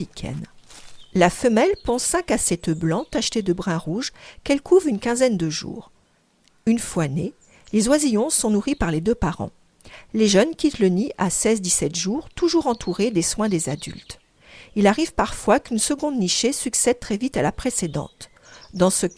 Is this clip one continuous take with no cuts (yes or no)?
yes